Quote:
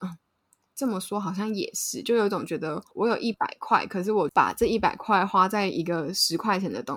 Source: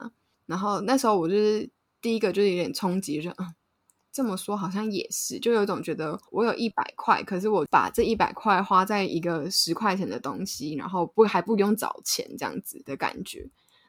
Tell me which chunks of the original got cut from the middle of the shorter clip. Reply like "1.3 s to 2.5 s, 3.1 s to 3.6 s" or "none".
none